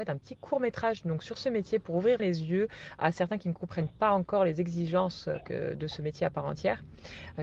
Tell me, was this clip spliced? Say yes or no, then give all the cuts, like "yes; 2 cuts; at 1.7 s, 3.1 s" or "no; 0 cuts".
yes; 1 cut; at 2.2 s